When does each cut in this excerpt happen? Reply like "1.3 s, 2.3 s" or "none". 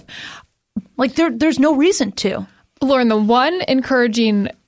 0.9 s